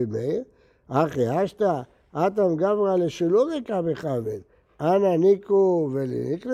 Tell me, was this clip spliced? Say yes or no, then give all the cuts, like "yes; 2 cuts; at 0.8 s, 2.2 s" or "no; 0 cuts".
no; 0 cuts